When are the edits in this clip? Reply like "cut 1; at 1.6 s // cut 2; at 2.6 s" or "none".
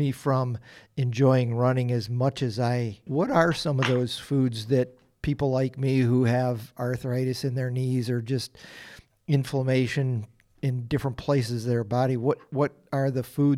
cut 1; at 3.1 s